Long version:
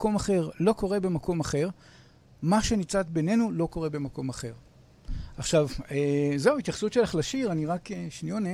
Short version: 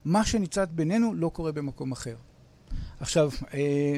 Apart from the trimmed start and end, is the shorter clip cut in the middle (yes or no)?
no